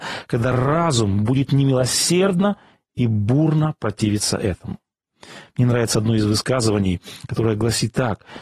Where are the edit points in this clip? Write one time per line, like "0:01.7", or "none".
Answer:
none